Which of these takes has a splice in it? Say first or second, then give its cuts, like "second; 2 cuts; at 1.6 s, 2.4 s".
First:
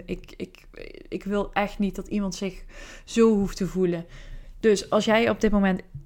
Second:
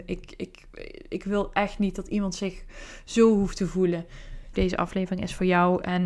second; 1 cut; at 4.5 s